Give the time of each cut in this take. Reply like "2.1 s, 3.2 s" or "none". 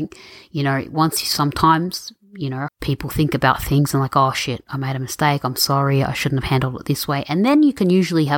2.7 s